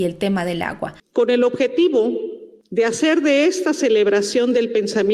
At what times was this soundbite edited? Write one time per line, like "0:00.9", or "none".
0:01.0